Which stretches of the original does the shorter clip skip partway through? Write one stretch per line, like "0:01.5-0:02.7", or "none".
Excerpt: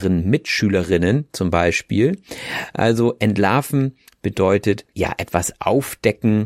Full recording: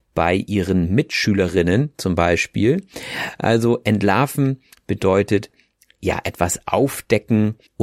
0:05.5-0:06.0